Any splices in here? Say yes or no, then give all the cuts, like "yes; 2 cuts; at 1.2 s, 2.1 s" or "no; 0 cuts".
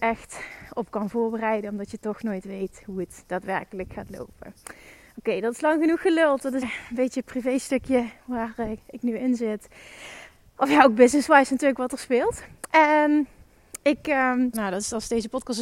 yes; 2 cuts; at 6.6 s, 14.5 s